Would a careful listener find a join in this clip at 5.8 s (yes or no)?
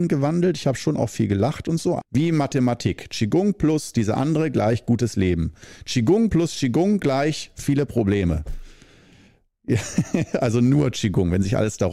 no